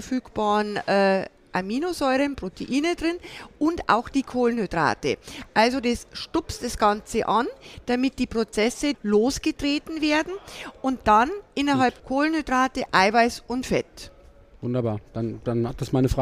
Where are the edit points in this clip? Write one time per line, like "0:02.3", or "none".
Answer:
0:08.9
0:12.0